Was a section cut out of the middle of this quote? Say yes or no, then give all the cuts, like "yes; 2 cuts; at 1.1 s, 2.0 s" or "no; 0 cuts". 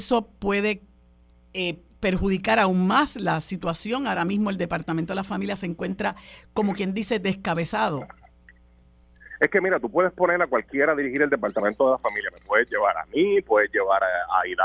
no; 0 cuts